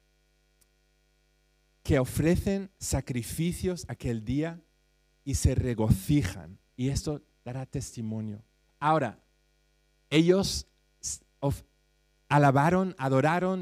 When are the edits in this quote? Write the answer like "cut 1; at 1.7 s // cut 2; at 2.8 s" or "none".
cut 1; at 2.7 s // cut 2; at 6.7 s // cut 3; at 8.6 s